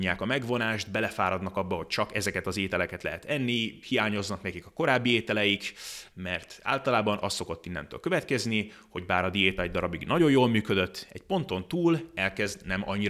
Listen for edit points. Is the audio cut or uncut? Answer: cut